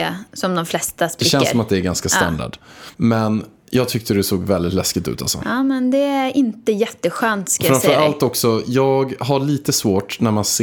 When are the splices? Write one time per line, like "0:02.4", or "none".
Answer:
0:02.9